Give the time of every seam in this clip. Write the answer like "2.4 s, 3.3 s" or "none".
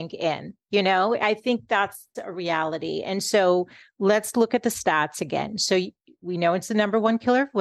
2.1 s